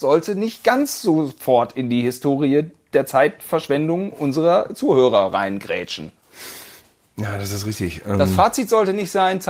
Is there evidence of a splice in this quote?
no; 0 cuts

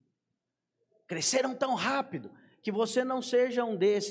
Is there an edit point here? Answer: no; 0 cuts

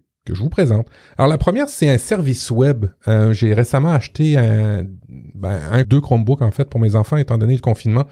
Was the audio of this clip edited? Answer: yes; 1 cut; at 5.8 s

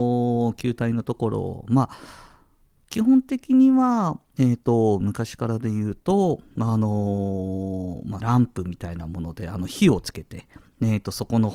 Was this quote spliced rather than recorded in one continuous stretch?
yes; 1 cut; at 8.2 s

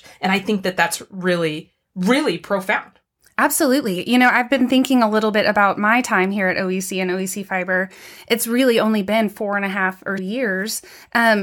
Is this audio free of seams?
no; 1 cut; at 10.2 s

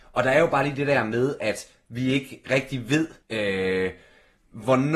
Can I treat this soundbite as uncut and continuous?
no; 1 cut; at 3.2 s

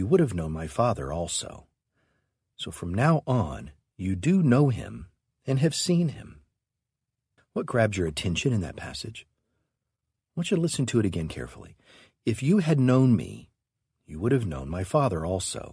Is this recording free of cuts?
no; 1 cut; at 7.4 s

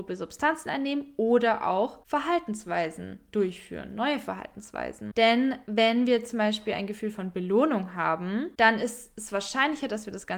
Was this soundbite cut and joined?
no; 0 cuts

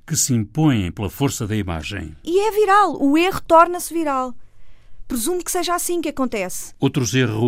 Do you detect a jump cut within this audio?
yes; 1 cut; at 2.2 s

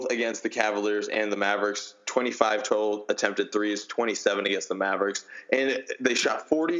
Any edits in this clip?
no; 0 cuts

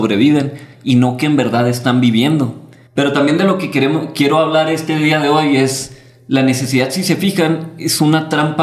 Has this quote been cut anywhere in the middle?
yes; 1 cut; at 2.9 s

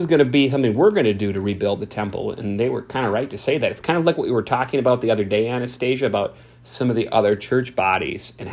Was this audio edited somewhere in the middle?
no; 0 cuts

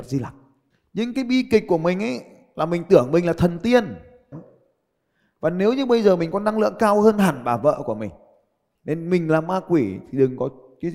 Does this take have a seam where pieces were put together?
yes; 2 cuts; at 4.3 s, 8.7 s

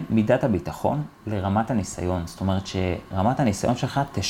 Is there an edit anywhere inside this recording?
no; 0 cuts

